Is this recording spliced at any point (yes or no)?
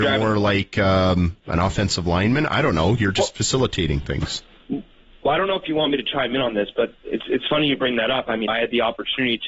yes